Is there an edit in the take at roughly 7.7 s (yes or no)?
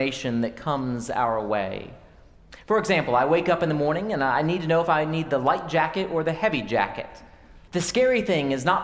yes